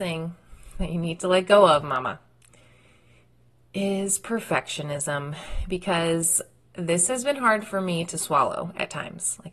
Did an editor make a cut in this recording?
no; 0 cuts

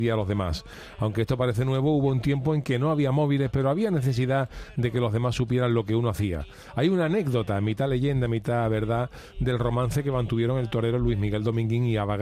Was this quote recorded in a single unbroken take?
yes; 0 cuts

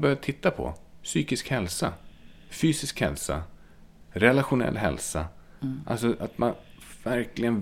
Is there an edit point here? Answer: no; 0 cuts

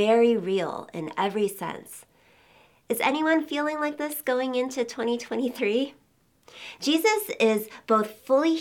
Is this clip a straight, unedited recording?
yes; 0 cuts

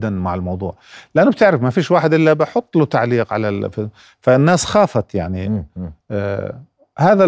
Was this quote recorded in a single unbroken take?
yes; 0 cuts

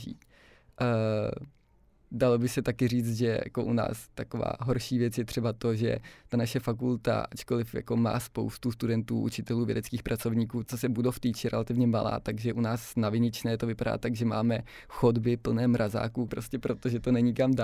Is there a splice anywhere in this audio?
yes; 2 cuts; at 10.6 s, 16.3 s

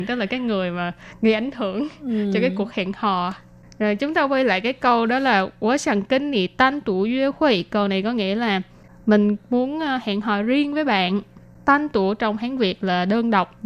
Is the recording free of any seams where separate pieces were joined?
yes; 0 cuts

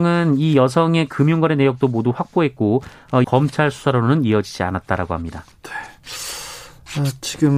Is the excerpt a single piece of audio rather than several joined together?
no; 1 cut; at 3.2 s

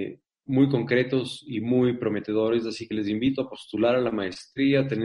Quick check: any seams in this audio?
no; 0 cuts

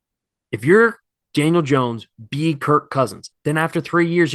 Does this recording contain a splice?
yes; 1 cut; at 3.3 s

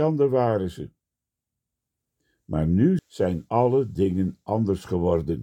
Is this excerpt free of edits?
no; 1 cut; at 3.0 s

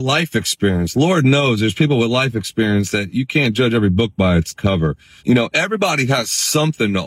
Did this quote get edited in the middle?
yes; 1 cut; at 5.2 s

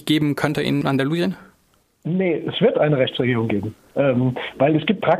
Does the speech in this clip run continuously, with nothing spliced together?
yes; 0 cuts

